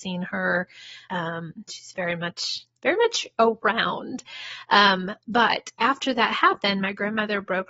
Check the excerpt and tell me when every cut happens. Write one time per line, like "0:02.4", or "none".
0:01.1